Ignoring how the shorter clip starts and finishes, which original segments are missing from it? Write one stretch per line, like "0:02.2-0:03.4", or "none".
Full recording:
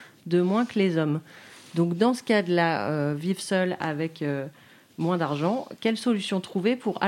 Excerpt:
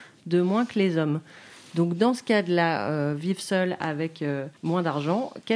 0:04.6-0:04.9